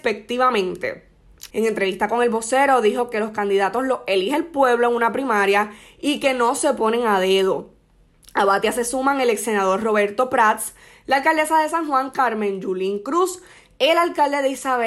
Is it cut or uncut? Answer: cut